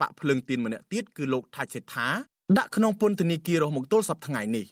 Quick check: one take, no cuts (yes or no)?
yes